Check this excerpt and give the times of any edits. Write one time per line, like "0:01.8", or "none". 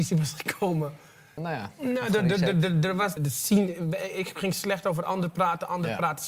0:01.4
0:03.2